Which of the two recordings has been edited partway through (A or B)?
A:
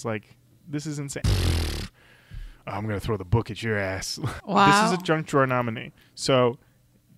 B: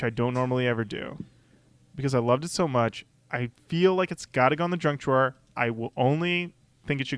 A